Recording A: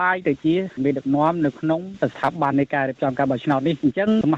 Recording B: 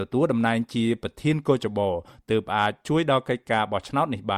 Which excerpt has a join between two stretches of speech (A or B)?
A